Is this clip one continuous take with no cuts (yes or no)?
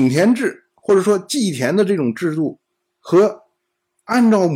yes